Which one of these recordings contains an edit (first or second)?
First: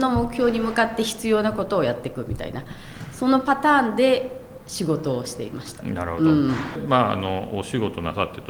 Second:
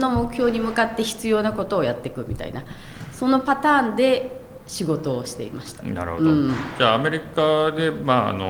first